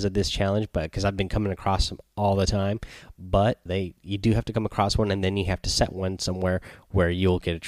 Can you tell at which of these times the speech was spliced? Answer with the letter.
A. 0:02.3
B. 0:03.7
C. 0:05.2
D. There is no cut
B